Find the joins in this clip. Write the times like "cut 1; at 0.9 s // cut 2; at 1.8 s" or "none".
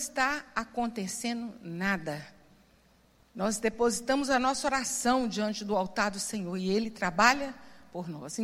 cut 1; at 3.2 s